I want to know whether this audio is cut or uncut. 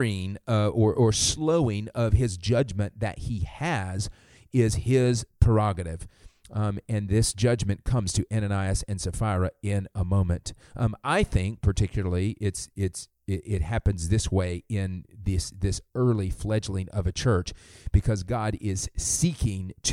uncut